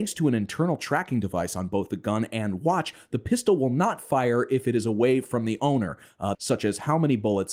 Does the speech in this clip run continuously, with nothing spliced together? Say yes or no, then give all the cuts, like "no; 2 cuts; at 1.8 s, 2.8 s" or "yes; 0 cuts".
no; 1 cut; at 6.3 s